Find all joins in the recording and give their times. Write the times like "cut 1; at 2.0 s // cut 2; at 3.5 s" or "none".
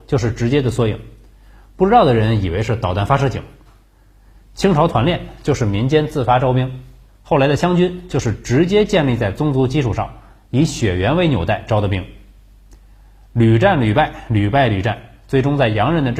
none